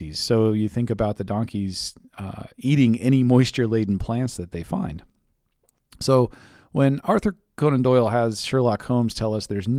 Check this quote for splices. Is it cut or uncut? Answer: uncut